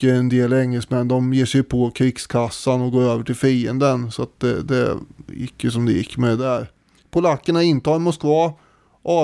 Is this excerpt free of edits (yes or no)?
yes